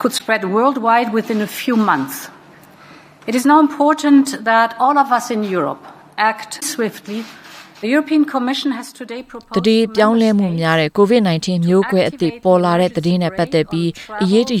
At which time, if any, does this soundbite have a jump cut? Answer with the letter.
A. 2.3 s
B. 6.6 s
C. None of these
B